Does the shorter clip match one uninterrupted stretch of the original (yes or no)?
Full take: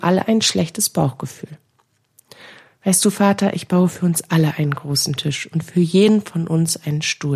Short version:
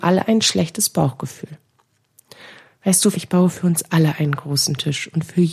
no